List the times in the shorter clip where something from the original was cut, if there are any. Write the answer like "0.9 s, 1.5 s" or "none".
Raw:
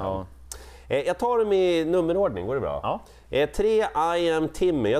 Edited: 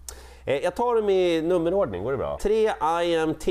2.4 s